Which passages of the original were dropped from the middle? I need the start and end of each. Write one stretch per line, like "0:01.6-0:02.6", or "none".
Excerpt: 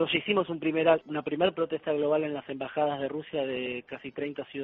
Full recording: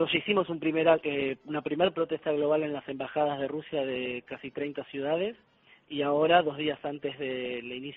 0:01.0-0:01.4